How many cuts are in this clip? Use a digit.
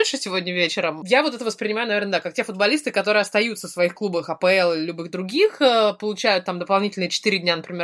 0